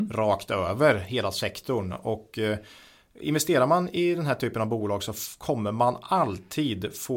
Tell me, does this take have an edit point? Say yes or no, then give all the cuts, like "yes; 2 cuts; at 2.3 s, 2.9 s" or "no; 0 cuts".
no; 0 cuts